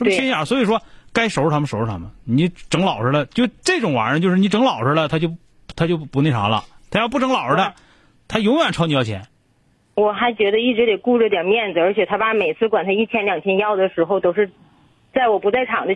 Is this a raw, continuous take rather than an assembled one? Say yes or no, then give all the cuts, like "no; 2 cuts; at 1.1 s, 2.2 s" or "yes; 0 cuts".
yes; 0 cuts